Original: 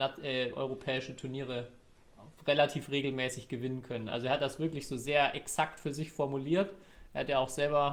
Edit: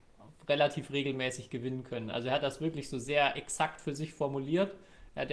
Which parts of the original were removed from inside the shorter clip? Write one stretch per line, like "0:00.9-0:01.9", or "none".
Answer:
none